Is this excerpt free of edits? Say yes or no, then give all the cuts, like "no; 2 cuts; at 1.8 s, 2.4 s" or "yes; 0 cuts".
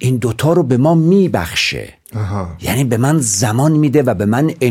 no; 1 cut; at 2.0 s